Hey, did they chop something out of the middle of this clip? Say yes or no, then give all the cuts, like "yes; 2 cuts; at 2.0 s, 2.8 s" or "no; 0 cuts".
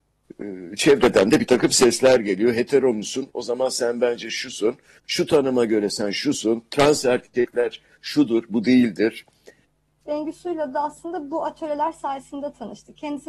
yes; 1 cut; at 10.0 s